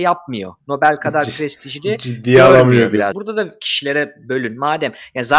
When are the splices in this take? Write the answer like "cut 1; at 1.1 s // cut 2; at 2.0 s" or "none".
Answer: cut 1; at 3.1 s

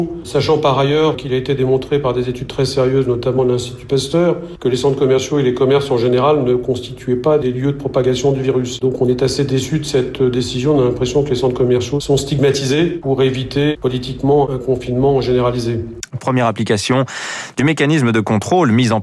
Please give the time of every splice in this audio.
cut 1; at 16.2 s

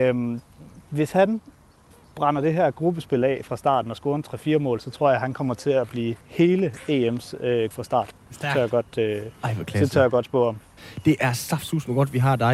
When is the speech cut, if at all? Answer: cut 1; at 6.2 s // cut 2; at 7.7 s

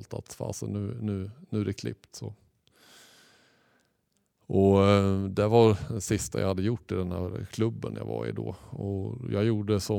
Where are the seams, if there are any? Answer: none

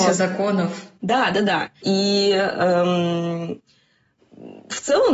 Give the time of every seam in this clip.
cut 1; at 1.8 s

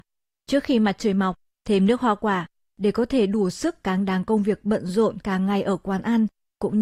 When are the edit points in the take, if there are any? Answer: cut 1; at 1.6 s

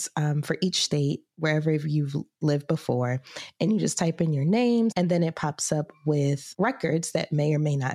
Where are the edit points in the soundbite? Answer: cut 1; at 4.9 s

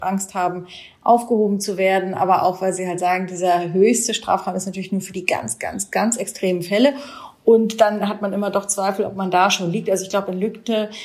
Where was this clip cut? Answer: cut 1; at 5.9 s

